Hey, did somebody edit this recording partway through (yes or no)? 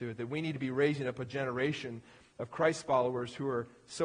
no